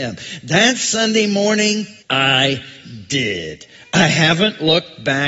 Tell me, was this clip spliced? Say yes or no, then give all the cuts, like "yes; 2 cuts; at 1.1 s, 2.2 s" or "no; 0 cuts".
yes; 1 cut; at 2.0 s